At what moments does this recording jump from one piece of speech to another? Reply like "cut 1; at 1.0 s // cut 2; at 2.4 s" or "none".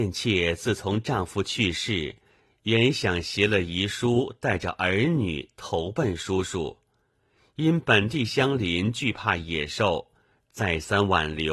none